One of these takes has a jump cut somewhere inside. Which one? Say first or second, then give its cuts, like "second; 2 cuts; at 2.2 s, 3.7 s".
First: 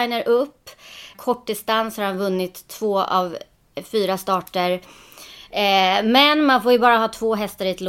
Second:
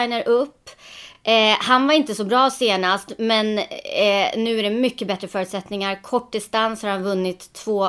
first; 2 cuts; at 1.1 s, 5.5 s